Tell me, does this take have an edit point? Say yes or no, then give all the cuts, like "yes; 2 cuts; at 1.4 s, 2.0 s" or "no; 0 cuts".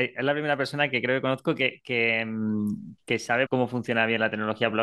yes; 1 cut; at 3.5 s